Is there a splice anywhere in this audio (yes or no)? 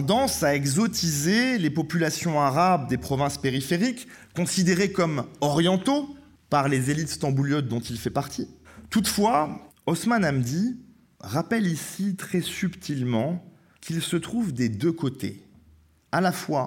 yes